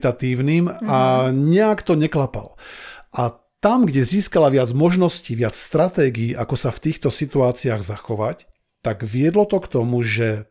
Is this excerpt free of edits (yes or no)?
yes